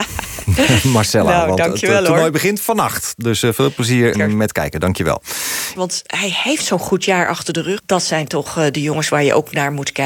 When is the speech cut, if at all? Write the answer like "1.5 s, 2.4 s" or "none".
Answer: 4.1 s, 5.7 s, 7.8 s